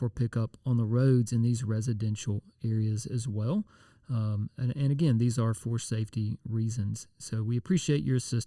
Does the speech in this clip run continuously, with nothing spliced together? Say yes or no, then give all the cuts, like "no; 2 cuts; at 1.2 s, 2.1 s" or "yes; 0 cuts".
yes; 0 cuts